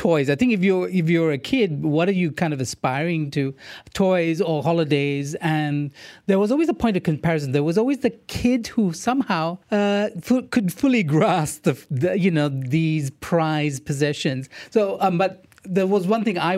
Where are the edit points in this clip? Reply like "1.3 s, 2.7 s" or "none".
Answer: 9.6 s